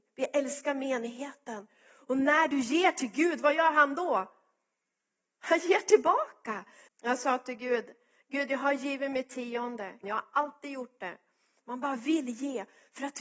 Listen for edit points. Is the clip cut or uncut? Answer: cut